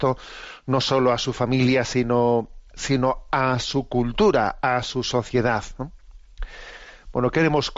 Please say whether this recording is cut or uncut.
uncut